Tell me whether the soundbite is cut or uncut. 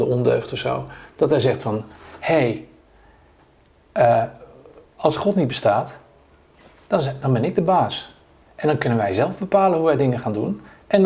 uncut